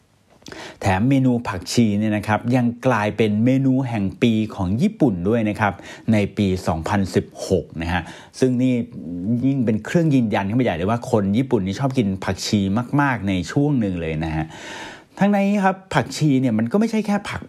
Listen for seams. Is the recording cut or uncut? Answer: uncut